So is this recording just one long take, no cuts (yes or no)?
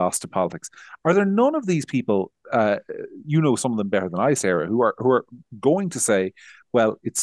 yes